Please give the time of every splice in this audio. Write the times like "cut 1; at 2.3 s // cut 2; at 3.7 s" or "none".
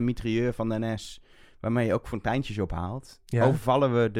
cut 1; at 3.2 s